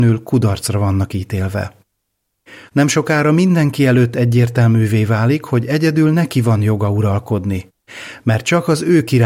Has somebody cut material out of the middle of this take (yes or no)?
yes